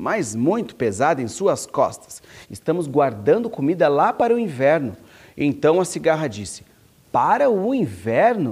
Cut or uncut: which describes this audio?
cut